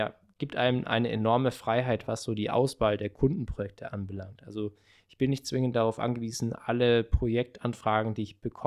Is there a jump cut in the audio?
no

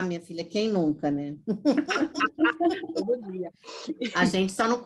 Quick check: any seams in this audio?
no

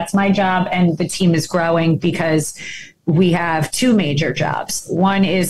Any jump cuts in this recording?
no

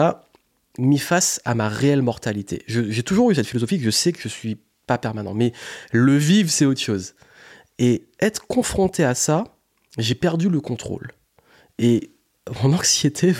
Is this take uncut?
yes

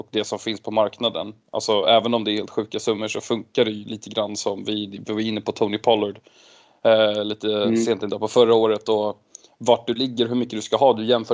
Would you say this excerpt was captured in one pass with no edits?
yes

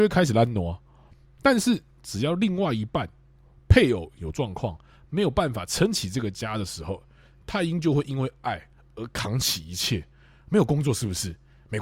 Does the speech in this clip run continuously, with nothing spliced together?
yes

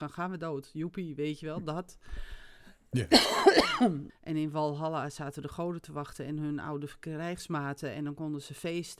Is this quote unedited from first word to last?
no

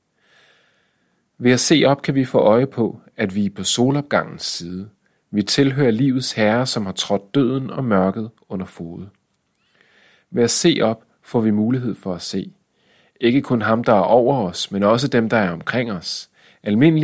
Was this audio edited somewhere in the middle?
no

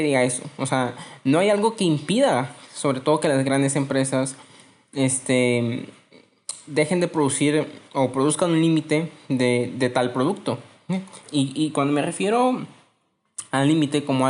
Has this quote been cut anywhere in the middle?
yes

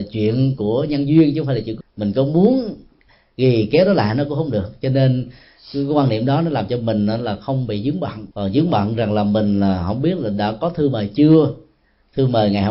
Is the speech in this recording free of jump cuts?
no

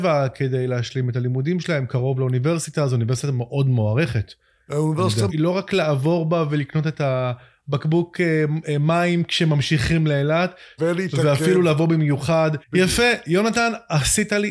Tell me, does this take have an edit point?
yes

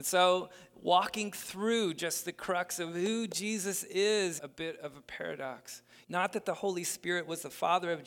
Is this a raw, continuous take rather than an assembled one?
no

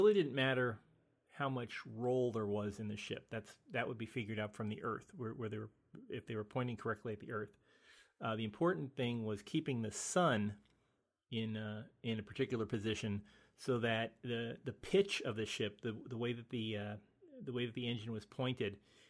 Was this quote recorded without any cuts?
yes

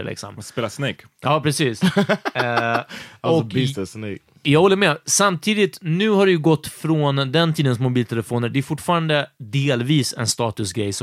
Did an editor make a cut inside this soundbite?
no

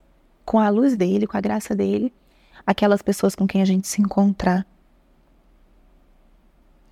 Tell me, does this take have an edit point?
yes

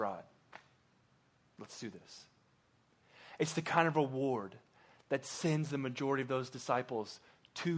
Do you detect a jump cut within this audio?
no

